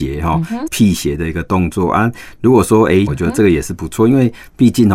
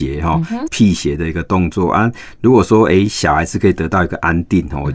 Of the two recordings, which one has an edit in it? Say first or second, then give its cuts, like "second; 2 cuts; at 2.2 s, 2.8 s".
first; 1 cut; at 3.1 s